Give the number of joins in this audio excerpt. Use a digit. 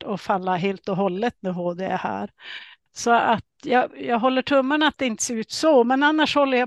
1